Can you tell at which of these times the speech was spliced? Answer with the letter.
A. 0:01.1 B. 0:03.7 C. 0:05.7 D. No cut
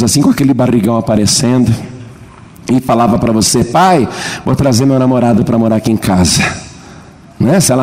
D